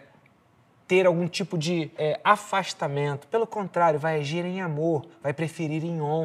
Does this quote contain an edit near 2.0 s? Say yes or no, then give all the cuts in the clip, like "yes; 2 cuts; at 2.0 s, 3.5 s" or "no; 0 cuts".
yes; 1 cut; at 2.0 s